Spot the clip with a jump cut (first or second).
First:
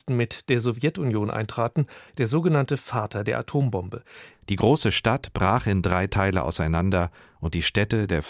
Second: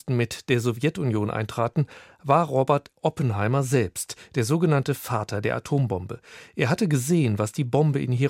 first